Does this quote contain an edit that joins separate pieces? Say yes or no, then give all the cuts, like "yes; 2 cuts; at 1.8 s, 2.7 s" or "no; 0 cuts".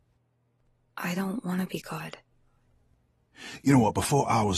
no; 0 cuts